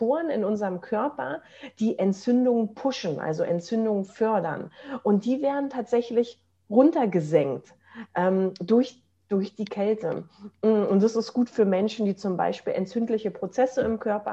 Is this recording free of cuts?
yes; 0 cuts

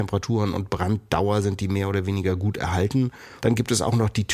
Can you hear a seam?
yes; 1 cut; at 3.4 s

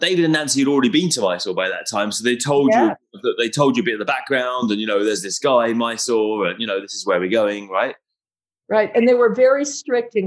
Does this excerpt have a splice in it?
no; 0 cuts

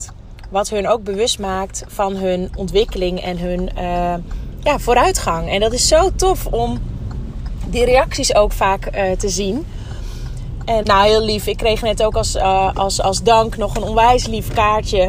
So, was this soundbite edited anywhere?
yes; 1 cut; at 10.8 s

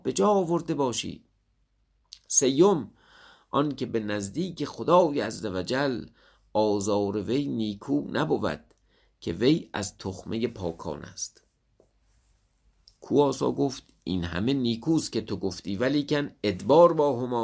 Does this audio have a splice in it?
no; 0 cuts

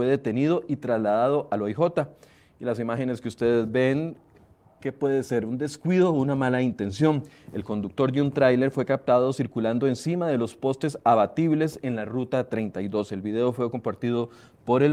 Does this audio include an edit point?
no; 0 cuts

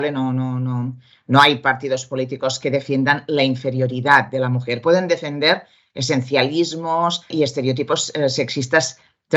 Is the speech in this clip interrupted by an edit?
yes; 1 cut; at 7.3 s

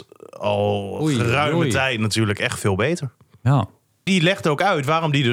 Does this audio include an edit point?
yes; 1 cut; at 4.1 s

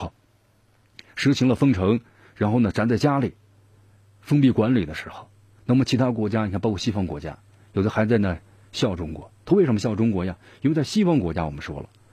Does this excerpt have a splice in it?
no; 0 cuts

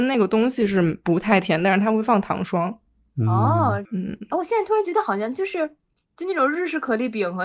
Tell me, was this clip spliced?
yes; 1 cut; at 3.9 s

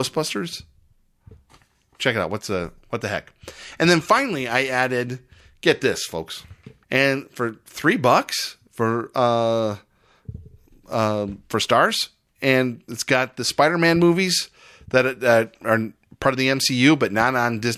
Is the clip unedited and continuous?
no; 1 cut; at 6.8 s

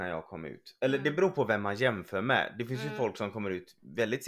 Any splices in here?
no; 0 cuts

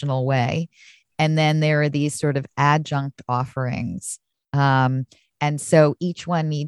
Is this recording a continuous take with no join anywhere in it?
yes; 0 cuts

